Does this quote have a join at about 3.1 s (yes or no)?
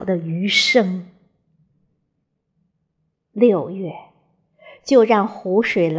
yes